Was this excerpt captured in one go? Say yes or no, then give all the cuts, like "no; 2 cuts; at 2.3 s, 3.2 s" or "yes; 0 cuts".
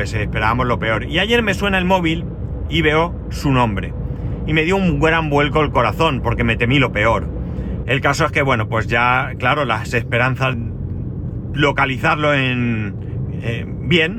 no; 2 cuts; at 7.8 s, 10.5 s